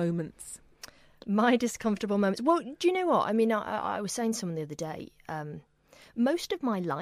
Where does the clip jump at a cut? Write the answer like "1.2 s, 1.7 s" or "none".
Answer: none

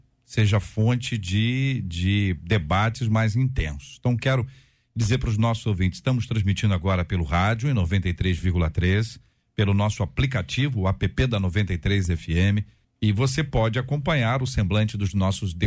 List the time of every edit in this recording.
12.8 s

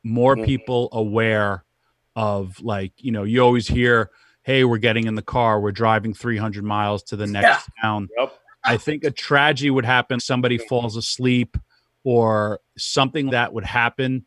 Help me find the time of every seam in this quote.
10.2 s, 13.3 s

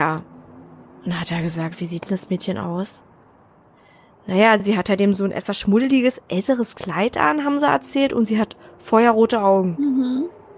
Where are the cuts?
none

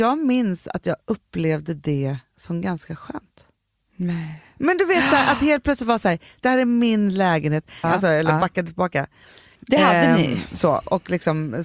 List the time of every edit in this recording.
6.4 s, 7.8 s, 9.6 s

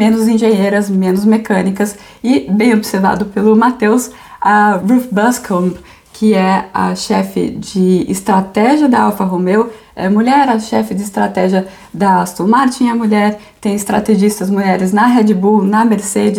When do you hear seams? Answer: 4.8 s

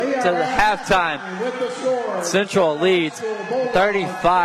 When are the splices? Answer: none

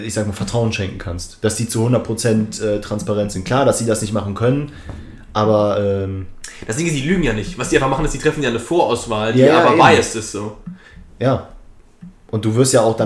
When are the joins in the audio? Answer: none

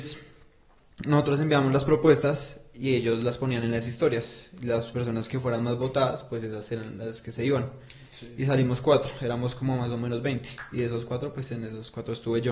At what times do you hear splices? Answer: none

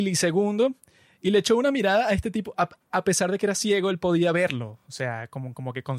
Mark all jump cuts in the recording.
none

